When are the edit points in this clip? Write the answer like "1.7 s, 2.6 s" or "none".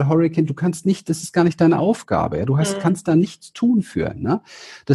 none